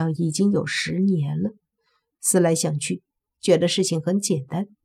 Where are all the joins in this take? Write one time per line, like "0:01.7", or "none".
0:02.1